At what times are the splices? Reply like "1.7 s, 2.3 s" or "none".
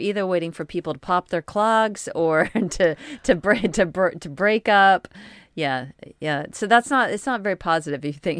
none